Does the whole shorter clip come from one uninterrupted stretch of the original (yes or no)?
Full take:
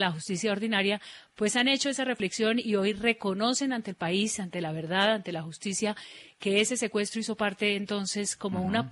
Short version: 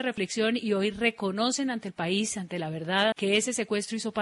no